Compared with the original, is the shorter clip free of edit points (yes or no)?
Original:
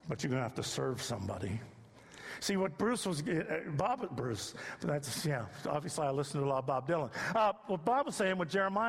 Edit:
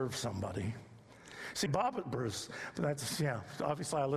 no